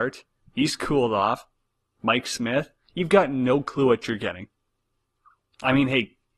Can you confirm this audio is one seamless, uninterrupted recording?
yes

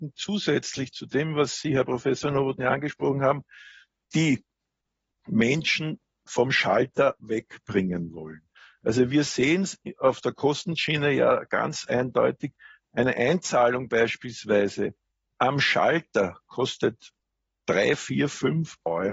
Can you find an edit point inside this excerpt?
no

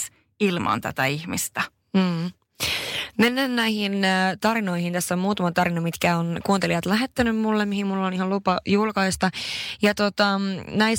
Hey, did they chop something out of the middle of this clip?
no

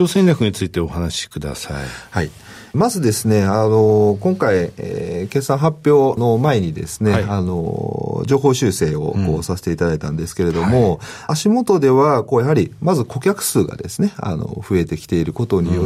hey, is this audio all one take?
yes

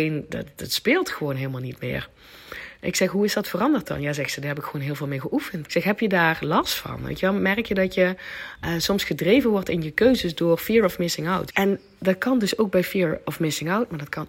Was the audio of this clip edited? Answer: yes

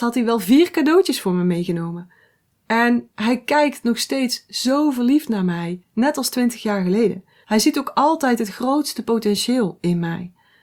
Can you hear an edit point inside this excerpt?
yes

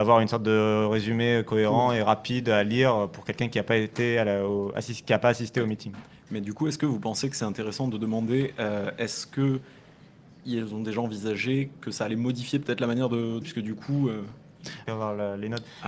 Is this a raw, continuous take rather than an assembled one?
no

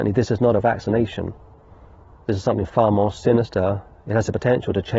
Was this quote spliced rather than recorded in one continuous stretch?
no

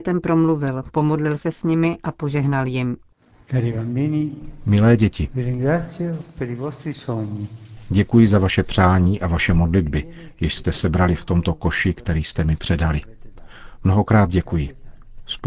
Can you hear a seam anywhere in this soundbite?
no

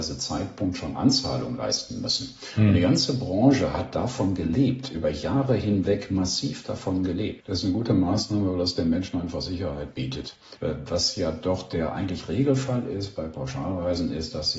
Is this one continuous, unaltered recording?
no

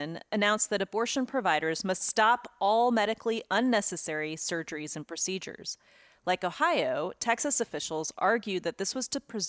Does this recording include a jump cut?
no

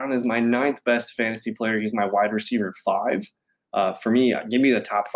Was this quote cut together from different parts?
yes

